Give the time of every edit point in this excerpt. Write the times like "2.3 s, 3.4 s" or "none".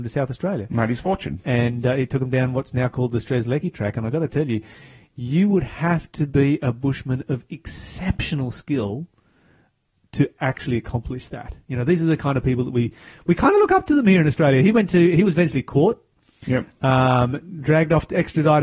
none